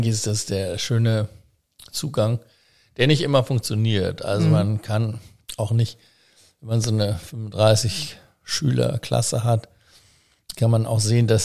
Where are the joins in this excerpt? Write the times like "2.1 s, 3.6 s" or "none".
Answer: none